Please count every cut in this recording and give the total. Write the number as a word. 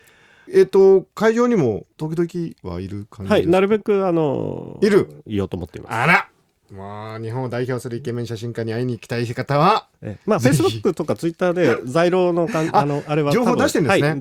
one